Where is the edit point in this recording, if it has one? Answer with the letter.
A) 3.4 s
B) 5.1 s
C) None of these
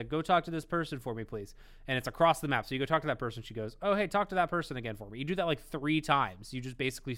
C